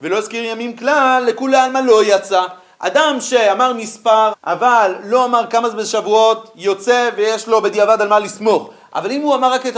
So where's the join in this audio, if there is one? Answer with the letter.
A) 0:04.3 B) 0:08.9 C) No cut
A